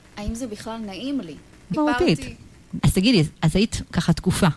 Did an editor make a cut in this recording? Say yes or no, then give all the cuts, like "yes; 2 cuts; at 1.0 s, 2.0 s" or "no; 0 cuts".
yes; 2 cuts; at 1.7 s, 2.8 s